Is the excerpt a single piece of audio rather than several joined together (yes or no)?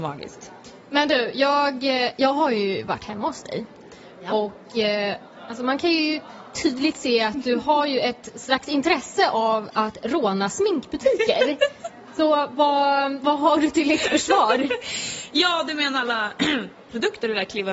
yes